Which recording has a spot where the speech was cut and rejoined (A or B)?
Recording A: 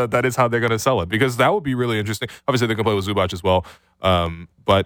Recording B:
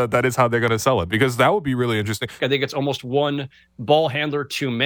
B